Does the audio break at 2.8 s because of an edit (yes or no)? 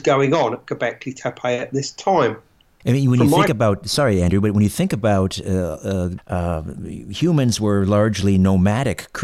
yes